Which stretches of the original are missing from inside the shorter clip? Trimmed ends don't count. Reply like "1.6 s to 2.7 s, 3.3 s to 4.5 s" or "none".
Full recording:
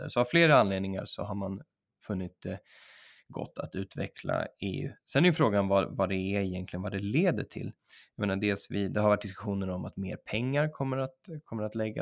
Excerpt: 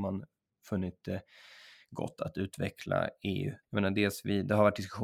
5.0 s to 8.1 s